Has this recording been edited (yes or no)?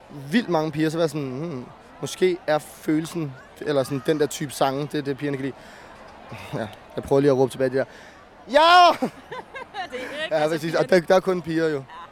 yes